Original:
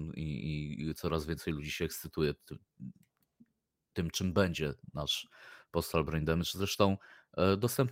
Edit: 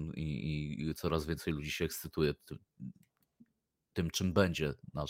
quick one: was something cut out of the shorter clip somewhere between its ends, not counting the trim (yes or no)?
no